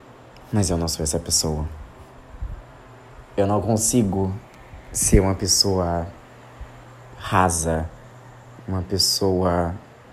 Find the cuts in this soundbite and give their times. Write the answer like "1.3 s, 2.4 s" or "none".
3.4 s, 8.6 s